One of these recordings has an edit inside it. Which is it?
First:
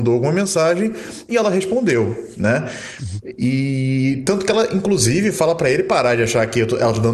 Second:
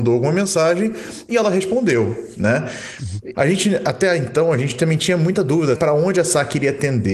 second; 2 cuts; at 3.3 s, 5.7 s

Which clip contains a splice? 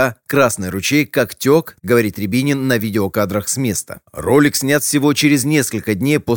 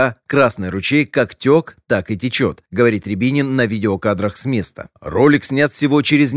first; 1 cut; at 1.8 s

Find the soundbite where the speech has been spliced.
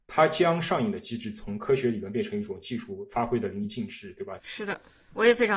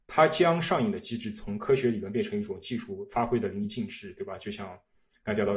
first; 1 cut; at 4.4 s

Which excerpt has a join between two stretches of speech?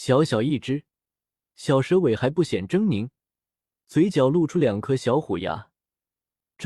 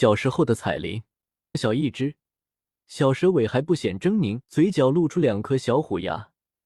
second; 2 cuts; at 1.5 s, 4.4 s

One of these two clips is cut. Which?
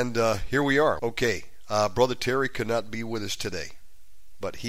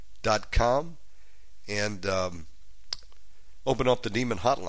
first; 1 cut; at 1.0 s

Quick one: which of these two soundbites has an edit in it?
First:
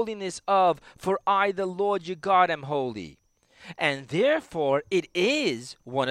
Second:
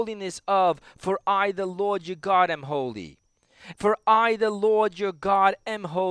second; 1 cut; at 3.7 s

